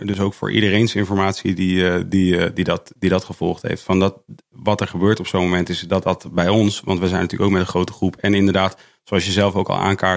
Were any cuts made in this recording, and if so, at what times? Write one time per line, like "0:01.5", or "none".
none